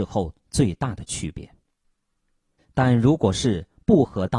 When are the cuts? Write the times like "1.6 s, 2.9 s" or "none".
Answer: 2.6 s

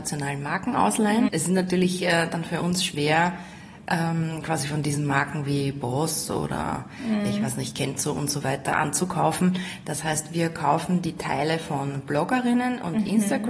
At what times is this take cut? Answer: 1.3 s

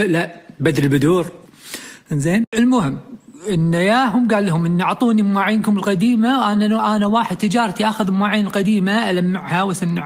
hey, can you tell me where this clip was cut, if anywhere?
none

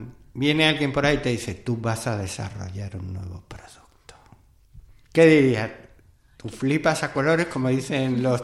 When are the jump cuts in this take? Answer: 5.0 s

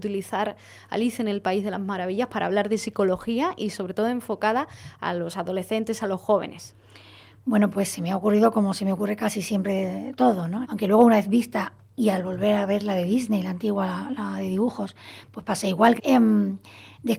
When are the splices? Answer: 10.6 s, 16.0 s

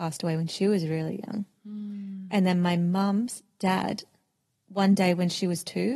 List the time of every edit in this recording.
none

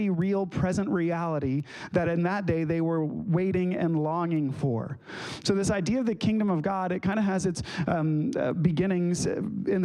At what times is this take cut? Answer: none

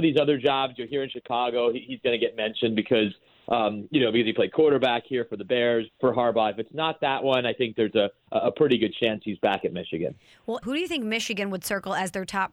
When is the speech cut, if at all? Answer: 5.9 s, 10.6 s

